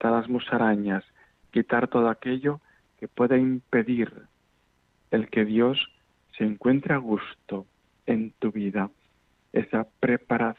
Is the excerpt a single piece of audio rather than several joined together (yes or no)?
yes